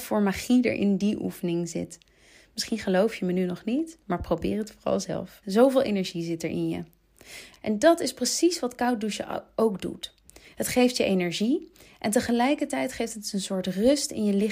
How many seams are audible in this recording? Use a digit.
2